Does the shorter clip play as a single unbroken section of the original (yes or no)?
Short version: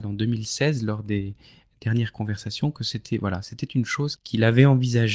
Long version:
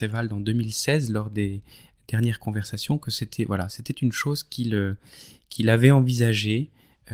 no